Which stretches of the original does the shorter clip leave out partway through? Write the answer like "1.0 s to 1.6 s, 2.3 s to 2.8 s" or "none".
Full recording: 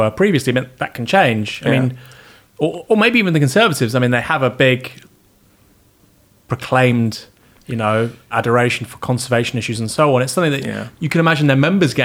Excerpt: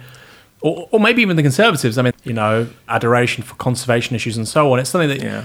4.1 s to 7.5 s